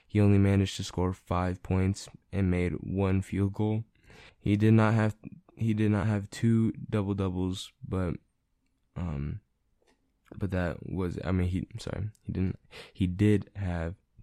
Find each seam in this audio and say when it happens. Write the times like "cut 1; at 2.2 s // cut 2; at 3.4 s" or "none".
cut 1; at 4.3 s